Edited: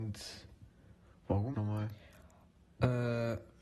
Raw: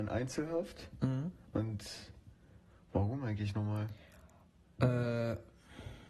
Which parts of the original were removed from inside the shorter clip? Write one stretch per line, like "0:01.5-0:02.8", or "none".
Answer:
0:03.2-0:03.5